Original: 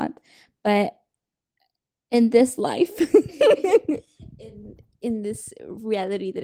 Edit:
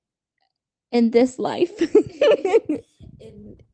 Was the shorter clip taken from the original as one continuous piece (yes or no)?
yes